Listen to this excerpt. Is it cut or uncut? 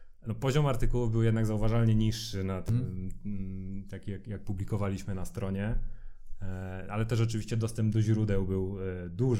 uncut